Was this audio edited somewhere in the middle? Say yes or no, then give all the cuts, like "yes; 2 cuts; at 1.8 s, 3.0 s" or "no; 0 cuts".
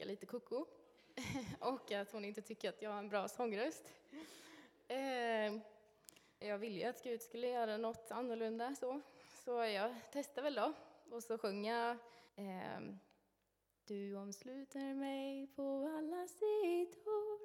yes; 2 cuts; at 6.4 s, 12.3 s